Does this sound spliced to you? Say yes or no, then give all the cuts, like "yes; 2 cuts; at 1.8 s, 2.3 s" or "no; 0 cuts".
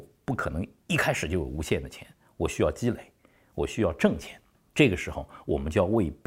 no; 0 cuts